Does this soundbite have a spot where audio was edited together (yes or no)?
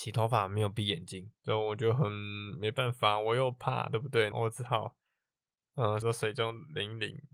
yes